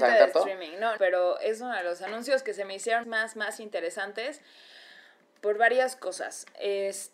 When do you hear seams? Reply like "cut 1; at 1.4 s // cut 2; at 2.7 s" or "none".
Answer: cut 1; at 1.0 s // cut 2; at 3.0 s